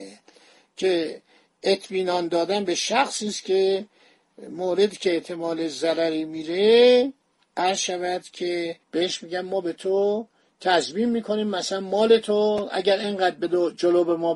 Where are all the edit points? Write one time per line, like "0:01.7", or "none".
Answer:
0:08.8